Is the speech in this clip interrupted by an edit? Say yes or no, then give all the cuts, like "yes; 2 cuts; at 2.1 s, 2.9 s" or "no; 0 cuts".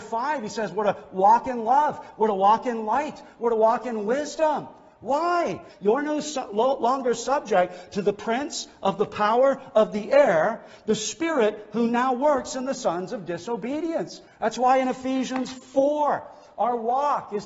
yes; 2 cuts; at 5.7 s, 14.3 s